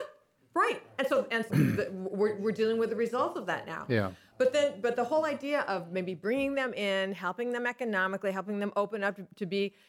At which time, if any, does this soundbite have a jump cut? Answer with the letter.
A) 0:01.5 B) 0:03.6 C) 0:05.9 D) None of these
A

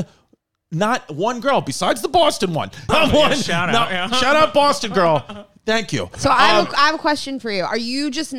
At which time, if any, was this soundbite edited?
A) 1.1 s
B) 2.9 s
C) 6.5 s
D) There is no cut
B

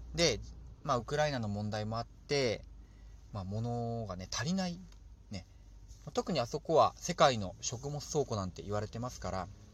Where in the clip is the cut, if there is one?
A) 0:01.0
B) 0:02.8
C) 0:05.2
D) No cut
D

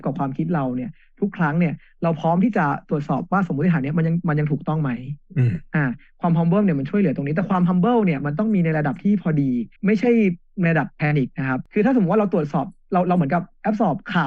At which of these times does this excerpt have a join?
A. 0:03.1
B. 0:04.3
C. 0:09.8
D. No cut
C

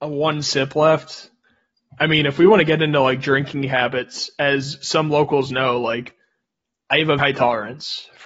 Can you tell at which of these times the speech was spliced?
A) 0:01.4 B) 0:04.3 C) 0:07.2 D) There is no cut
C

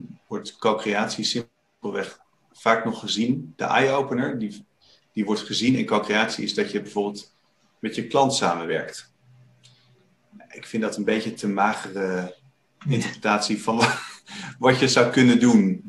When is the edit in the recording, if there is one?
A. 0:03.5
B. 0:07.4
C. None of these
C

